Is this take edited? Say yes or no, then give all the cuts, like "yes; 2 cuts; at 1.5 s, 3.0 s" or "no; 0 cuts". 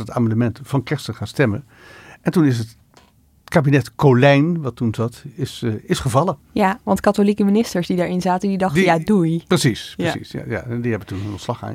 no; 0 cuts